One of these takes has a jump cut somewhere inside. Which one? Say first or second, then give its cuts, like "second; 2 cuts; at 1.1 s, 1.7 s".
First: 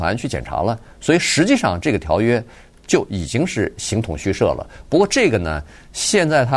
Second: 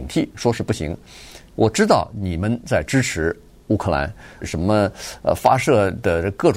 second; 1 cut; at 4.4 s